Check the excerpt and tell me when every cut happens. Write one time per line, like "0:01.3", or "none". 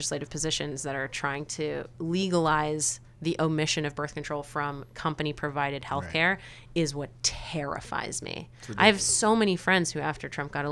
none